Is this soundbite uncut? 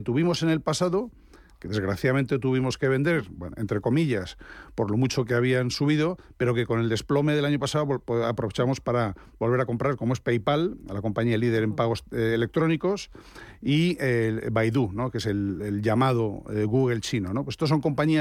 yes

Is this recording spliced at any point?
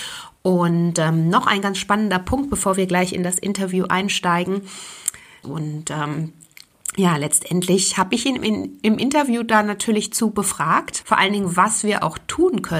yes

